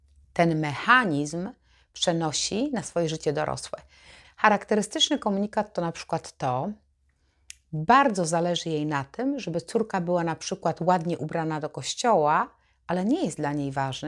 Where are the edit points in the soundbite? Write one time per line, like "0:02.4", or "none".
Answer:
0:04.2